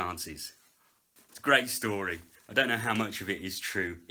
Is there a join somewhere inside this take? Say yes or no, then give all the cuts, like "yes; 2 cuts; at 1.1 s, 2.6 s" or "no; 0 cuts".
yes; 1 cut; at 1.2 s